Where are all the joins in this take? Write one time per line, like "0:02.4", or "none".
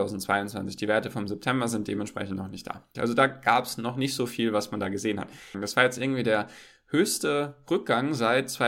0:02.9
0:05.5